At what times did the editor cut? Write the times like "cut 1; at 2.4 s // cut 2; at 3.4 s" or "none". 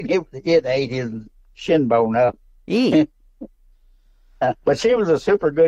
cut 1; at 4.6 s